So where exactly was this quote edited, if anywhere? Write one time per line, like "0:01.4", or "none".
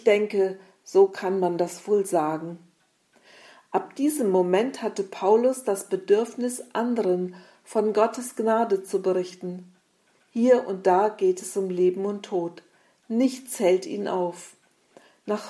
0:10.2